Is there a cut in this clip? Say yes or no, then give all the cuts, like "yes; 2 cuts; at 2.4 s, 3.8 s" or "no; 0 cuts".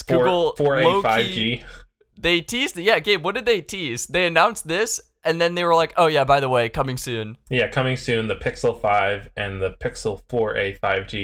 no; 0 cuts